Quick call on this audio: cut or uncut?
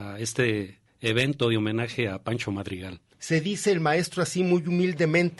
cut